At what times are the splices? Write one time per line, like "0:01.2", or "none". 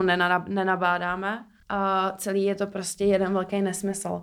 none